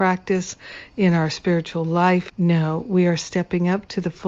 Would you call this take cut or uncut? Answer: cut